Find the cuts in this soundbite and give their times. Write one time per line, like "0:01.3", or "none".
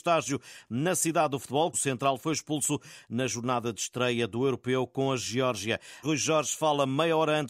0:01.7
0:06.0